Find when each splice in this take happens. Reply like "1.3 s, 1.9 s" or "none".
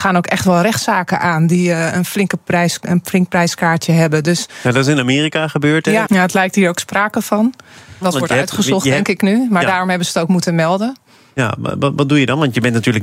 6.0 s, 8.0 s